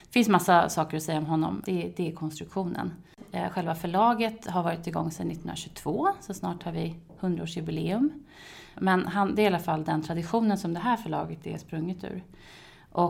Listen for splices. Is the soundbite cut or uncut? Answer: cut